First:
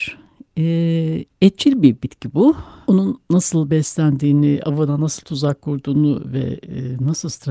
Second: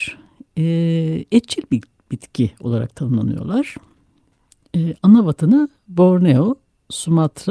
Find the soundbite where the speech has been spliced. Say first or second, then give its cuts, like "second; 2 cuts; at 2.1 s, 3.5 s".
first; 2 cuts; at 1.3 s, 2.8 s